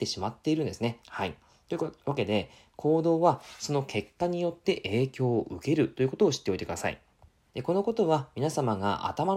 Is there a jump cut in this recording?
yes; 2 cuts; at 1.0 s, 7.5 s

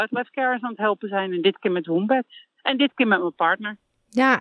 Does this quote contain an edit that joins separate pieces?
no; 0 cuts

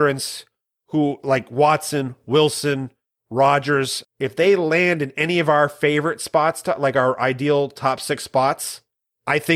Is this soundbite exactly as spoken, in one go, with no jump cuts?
no; 1 cut; at 4.0 s

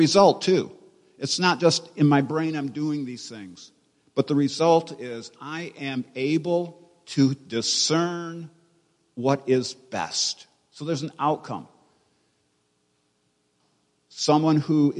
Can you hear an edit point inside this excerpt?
no; 0 cuts

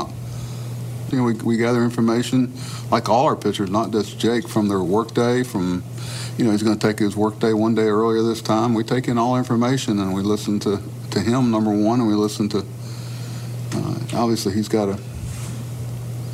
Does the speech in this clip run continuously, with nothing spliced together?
no; 1 cut; at 1.1 s

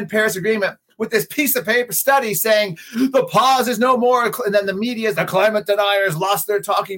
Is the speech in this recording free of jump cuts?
no; 1 cut; at 5.1 s

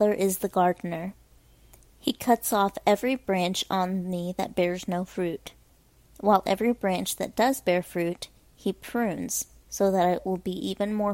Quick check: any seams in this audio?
no; 0 cuts

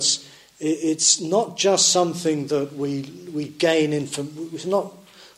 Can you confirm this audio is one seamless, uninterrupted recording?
yes; 0 cuts

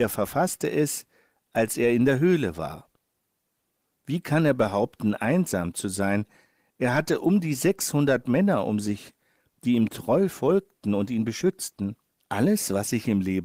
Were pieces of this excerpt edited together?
yes; 1 cut; at 12.2 s

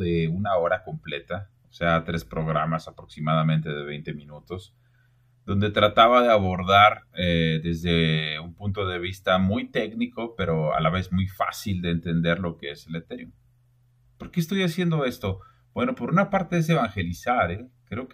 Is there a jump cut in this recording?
no; 0 cuts

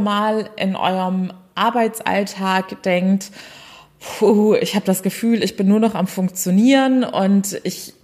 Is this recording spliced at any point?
no; 0 cuts

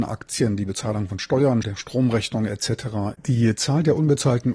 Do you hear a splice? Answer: yes; 2 cuts; at 1.6 s, 3.1 s

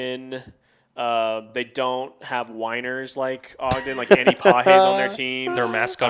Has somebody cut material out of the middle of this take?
no; 0 cuts

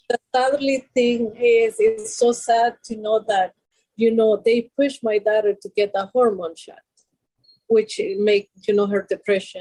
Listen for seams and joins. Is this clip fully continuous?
yes; 0 cuts

